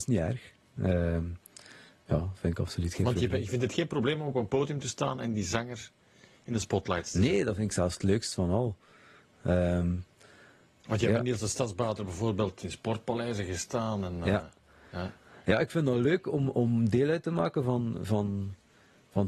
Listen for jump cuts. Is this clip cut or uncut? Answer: uncut